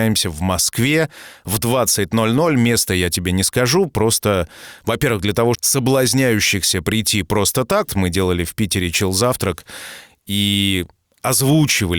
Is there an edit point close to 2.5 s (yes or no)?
no